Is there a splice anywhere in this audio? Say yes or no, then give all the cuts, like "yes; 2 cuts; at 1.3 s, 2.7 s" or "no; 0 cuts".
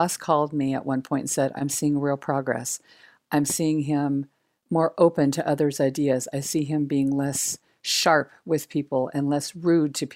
no; 0 cuts